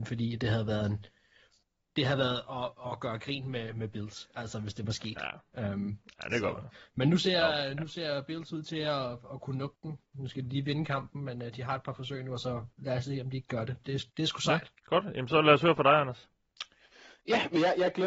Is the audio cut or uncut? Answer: cut